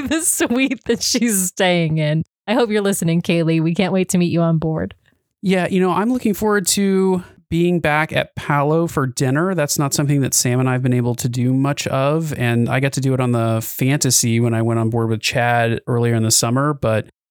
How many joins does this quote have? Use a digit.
0